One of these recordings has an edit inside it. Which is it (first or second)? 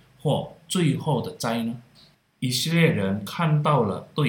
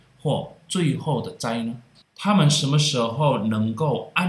second